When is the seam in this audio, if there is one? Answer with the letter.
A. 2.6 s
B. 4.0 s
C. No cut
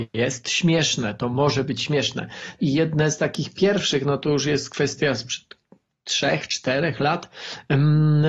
A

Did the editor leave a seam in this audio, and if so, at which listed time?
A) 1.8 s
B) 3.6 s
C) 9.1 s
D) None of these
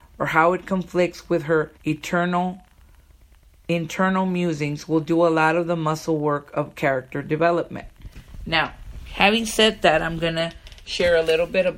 A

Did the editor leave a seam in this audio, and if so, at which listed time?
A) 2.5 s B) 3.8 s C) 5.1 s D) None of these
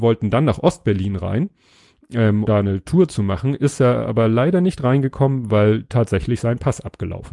A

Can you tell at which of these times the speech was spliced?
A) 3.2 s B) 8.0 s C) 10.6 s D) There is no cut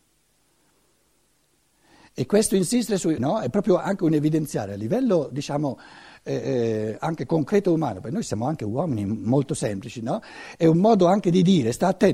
A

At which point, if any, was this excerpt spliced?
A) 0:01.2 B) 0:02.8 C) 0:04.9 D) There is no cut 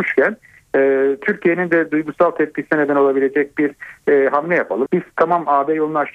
C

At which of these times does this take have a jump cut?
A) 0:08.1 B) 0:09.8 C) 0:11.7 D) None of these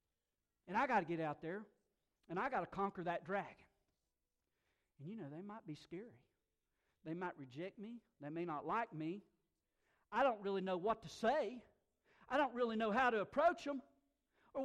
D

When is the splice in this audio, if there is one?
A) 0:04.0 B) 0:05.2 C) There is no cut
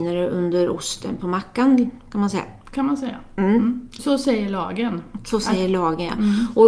A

